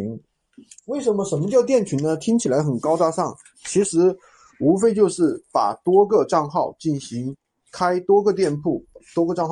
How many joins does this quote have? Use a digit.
0